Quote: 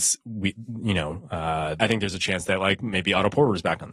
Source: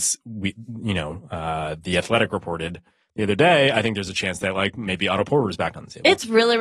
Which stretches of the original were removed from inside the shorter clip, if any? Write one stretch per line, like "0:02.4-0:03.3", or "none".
0:01.8-0:03.7